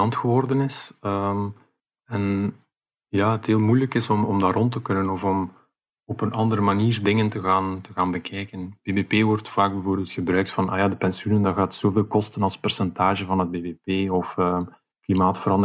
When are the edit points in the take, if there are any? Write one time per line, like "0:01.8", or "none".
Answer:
none